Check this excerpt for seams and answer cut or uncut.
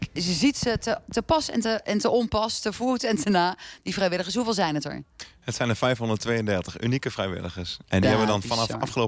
uncut